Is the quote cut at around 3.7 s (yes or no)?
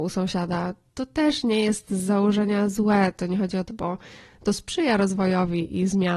yes